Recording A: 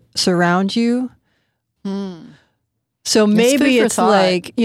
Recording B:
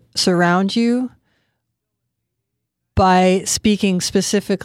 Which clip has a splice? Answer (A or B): A